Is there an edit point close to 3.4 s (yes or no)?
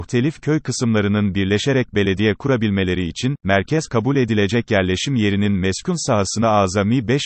yes